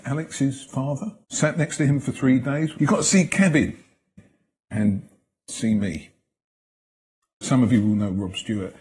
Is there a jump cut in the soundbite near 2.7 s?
yes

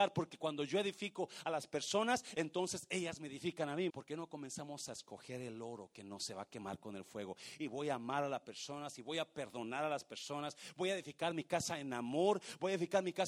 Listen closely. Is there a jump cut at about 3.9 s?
yes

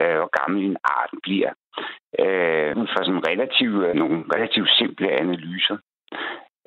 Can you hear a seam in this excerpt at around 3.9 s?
yes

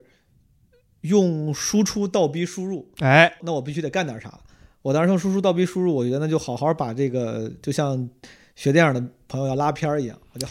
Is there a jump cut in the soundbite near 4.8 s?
no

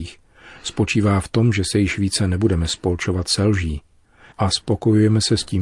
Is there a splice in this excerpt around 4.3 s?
yes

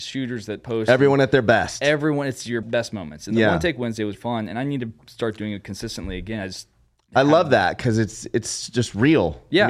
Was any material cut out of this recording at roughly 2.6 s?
yes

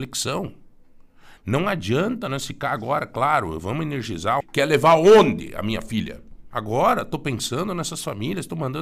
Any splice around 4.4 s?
yes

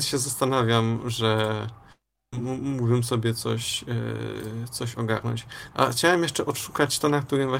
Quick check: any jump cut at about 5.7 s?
yes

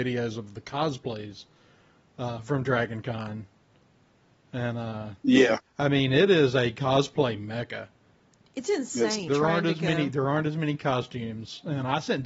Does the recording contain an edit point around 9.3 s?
yes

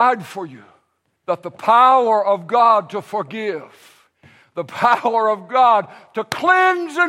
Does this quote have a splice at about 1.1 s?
yes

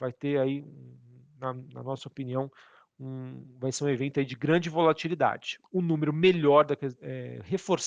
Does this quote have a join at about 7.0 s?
yes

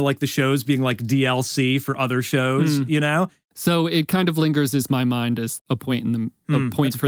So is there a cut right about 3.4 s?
yes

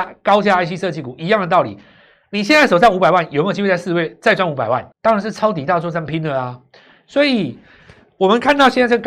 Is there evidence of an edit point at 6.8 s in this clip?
no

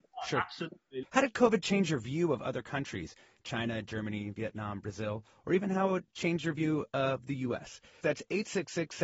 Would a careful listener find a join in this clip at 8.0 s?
yes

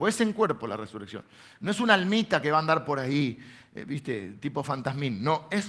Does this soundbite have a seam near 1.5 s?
no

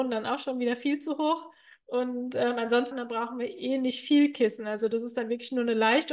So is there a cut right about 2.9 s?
yes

